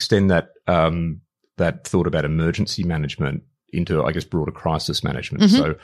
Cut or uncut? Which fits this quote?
uncut